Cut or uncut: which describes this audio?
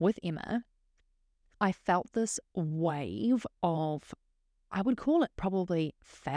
uncut